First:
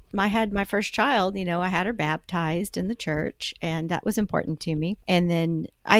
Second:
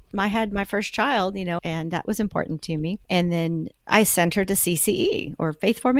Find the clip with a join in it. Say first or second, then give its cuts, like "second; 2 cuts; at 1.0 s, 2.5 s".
second; 1 cut; at 1.6 s